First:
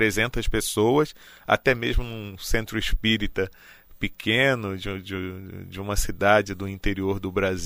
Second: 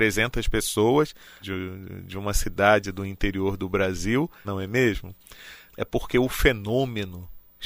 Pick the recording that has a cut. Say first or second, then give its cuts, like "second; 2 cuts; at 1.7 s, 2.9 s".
second; 3 cuts; at 1.4 s, 4.4 s, 5.7 s